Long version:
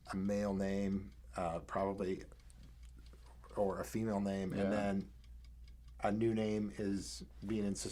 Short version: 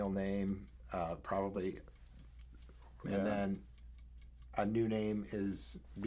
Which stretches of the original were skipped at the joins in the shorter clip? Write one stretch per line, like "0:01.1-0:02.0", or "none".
0:03.5-0:04.5